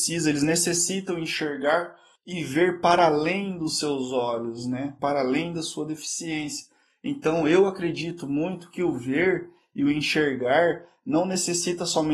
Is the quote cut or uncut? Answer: uncut